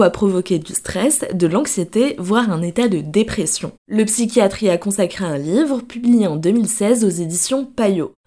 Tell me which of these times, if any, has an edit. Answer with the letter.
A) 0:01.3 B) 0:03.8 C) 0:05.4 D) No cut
B